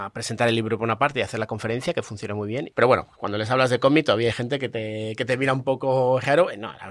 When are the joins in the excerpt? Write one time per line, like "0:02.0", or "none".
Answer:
0:02.7